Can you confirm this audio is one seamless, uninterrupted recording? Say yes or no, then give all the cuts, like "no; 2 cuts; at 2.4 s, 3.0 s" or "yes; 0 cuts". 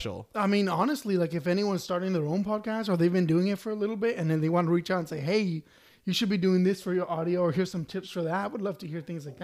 yes; 0 cuts